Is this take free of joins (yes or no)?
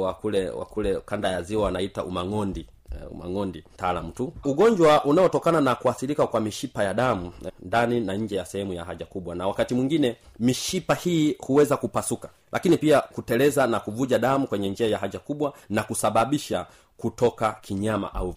no